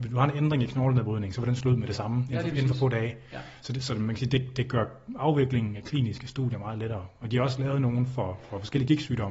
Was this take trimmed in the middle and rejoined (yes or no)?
no